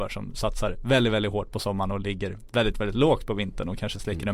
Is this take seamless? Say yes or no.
yes